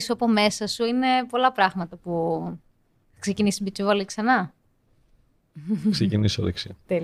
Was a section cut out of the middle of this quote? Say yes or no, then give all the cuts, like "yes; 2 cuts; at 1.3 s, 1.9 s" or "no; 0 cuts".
no; 0 cuts